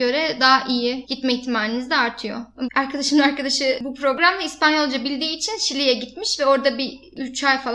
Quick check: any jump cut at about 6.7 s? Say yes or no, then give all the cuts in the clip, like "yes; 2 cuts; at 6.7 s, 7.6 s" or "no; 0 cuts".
no; 2 cuts; at 1.1 s, 2.7 s